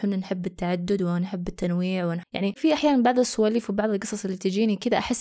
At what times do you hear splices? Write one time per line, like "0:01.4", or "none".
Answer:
0:02.6